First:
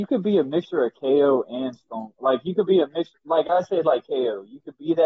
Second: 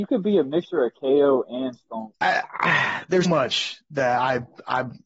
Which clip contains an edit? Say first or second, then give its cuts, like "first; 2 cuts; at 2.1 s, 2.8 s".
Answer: second; 2 cuts; at 2.1 s, 3.2 s